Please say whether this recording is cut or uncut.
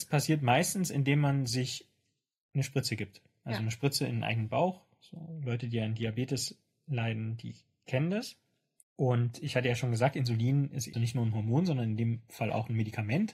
cut